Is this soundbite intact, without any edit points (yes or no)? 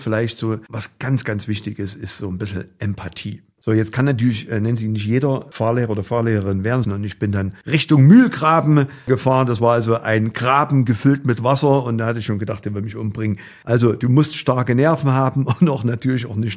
no